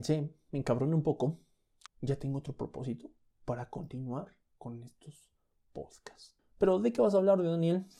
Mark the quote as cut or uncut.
cut